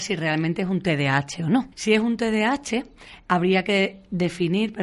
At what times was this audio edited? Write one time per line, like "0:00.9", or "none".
0:01.7